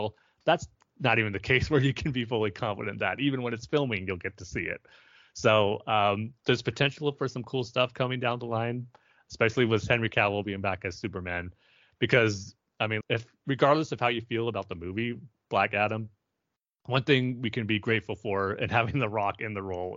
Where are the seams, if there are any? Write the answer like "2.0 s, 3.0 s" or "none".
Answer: 13.0 s